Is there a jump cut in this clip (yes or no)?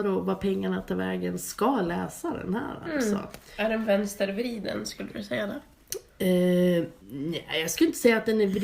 yes